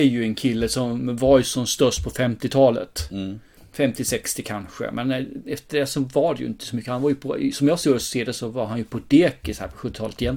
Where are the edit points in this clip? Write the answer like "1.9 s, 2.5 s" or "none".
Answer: none

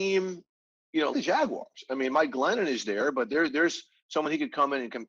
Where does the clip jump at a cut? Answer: 1.1 s

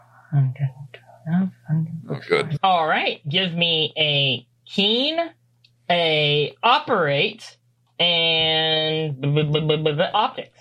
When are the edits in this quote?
2.6 s

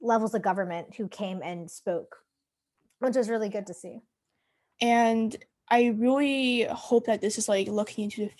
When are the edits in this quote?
4.7 s

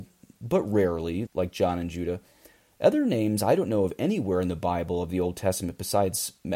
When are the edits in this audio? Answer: 1.3 s

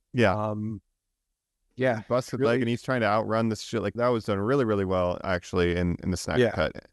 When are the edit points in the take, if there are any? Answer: 1.6 s, 4.0 s

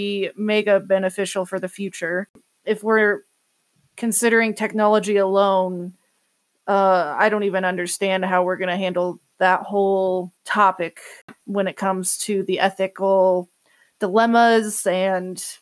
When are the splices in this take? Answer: 10.4 s

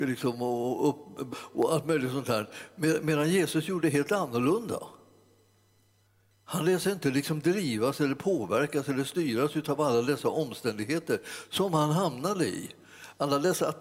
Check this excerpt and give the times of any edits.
1.3 s

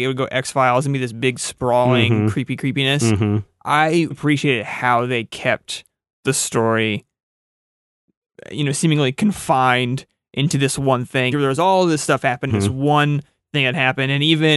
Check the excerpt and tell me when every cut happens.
4.1 s, 11.3 s, 12.5 s

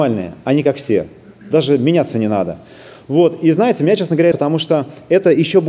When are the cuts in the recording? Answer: 4.3 s

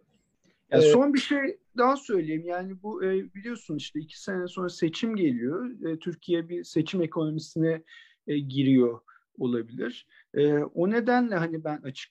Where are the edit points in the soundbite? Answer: none

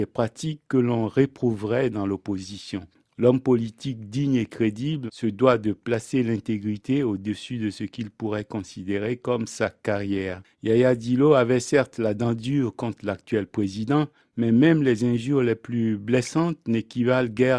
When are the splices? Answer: 5.1 s, 10.5 s

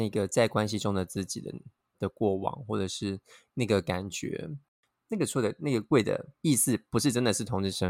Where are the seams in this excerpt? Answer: 5.0 s, 6.3 s

